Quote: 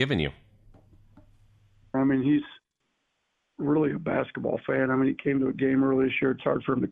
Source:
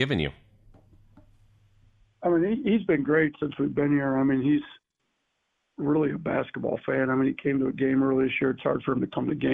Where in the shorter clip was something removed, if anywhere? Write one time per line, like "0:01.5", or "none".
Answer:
0:01.9